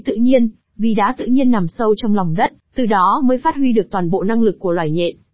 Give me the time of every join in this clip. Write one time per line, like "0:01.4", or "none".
0:02.6